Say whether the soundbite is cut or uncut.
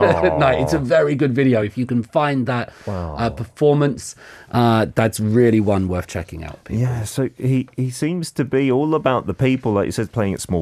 uncut